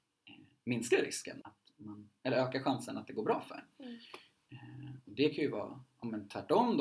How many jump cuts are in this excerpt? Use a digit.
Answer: 1